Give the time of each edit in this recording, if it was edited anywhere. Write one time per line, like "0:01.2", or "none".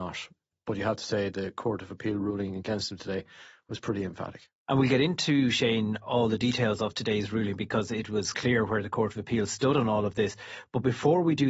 0:08.3